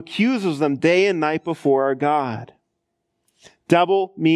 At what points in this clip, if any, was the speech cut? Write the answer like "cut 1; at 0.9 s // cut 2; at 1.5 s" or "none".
none